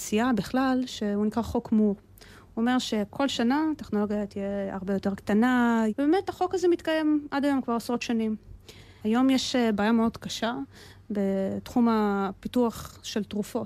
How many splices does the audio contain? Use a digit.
2